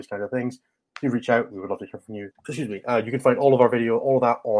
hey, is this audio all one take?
no; 1 cut; at 2.3 s

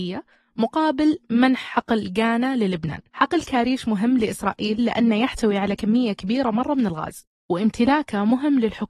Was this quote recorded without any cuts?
no; 1 cut; at 3.1 s

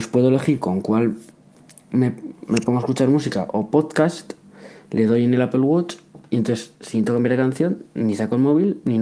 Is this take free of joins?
yes; 0 cuts

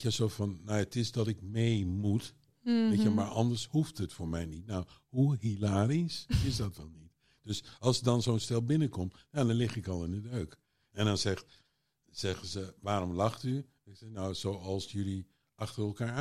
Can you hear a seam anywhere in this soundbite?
no; 0 cuts

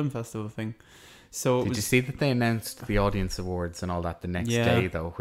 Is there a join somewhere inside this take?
no; 0 cuts

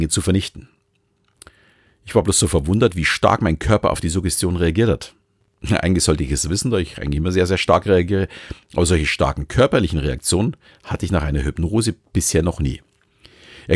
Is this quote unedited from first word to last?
yes; 0 cuts

